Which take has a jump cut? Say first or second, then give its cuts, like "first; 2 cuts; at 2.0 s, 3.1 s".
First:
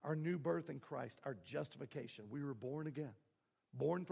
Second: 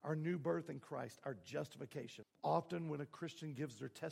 second; 1 cut; at 2.2 s